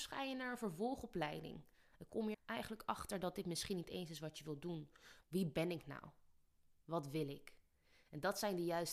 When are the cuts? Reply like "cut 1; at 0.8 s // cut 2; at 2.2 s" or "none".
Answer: cut 1; at 2.3 s // cut 2; at 5.2 s